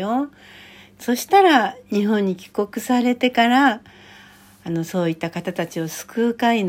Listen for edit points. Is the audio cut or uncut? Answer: uncut